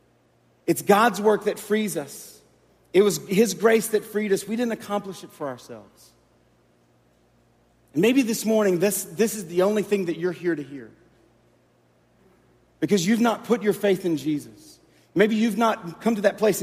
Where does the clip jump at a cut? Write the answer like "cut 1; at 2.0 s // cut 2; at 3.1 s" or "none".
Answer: none